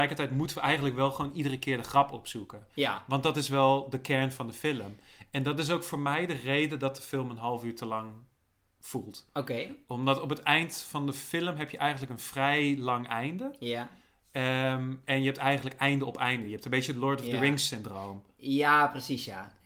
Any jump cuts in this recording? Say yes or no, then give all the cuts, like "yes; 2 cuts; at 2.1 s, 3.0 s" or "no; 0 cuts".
no; 0 cuts